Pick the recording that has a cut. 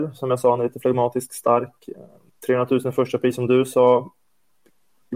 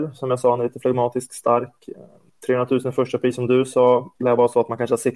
second; 1 cut; at 4.2 s

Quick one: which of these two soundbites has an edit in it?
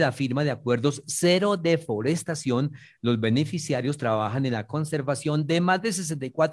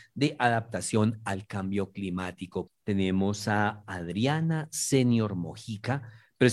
second; 1 cut; at 2.7 s

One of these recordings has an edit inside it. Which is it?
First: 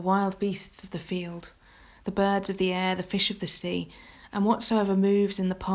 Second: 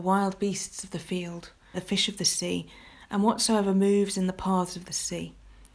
second; 1 cut; at 1.7 s

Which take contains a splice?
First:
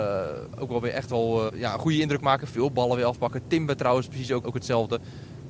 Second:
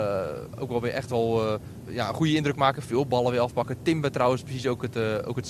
first; 2 cuts; at 1.5 s, 4.4 s

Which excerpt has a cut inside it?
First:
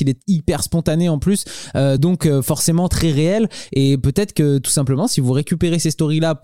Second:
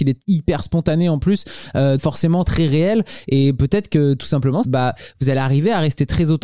second; 2 cuts; at 2.0 s, 4.6 s

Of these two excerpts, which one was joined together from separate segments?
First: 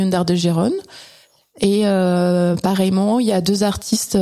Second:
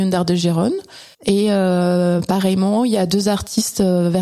second; 1 cut; at 1.1 s

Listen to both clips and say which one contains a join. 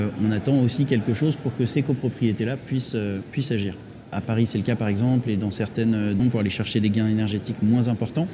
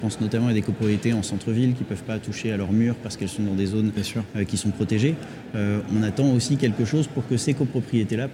first; 2 cuts; at 4.1 s, 6.2 s

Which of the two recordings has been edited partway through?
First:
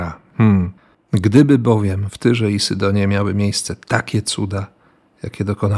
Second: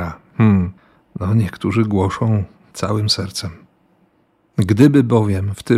first; 1 cut; at 0.9 s

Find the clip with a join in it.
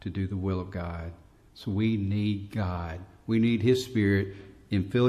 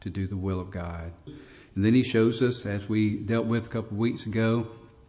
second; 1 cut; at 1.3 s

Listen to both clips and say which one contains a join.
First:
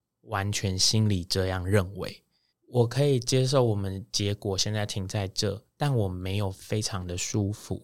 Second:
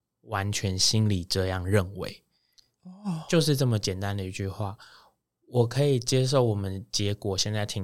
first; 1 cut; at 2.5 s

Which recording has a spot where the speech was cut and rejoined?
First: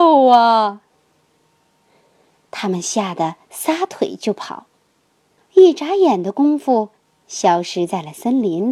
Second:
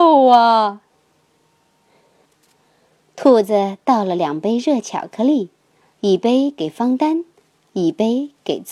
second; 1 cut; at 2.3 s

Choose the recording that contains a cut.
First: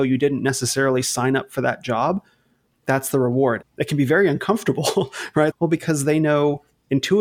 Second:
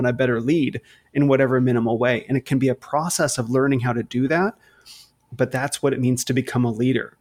first; 2 cuts; at 3.6 s, 5.5 s

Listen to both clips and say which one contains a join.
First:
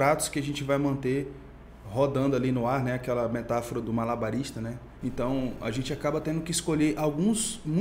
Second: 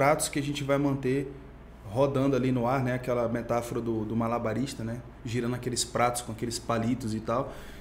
first; 2 cuts; at 3.8 s, 5.0 s

